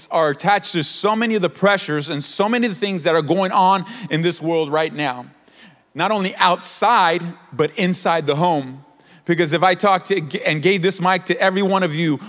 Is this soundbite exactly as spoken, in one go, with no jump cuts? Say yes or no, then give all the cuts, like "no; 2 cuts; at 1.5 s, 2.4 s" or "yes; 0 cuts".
yes; 0 cuts